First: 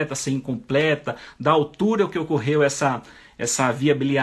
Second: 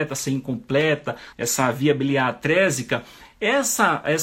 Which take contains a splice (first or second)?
second